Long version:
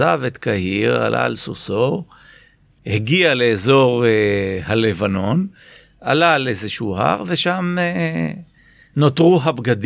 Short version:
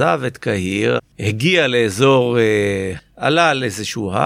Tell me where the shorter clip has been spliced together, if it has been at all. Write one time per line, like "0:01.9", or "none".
0:01.0
0:03.0